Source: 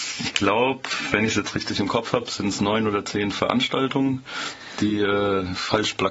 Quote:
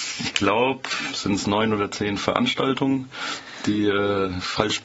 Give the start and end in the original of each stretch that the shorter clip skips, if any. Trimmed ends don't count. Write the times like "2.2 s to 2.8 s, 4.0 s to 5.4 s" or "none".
1.1 s to 2.3 s